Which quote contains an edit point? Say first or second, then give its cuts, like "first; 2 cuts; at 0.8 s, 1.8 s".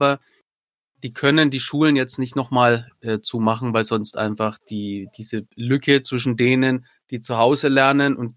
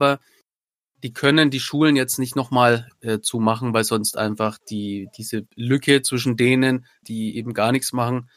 second; 1 cut; at 7.0 s